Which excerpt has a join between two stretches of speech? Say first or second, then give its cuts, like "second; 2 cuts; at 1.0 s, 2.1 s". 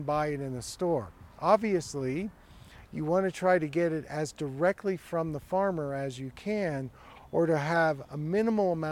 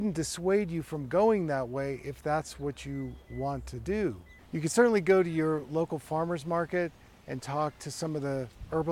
second; 1 cut; at 4.4 s